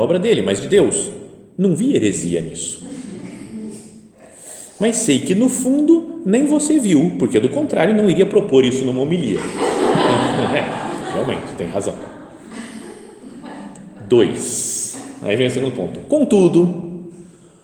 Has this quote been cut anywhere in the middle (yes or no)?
no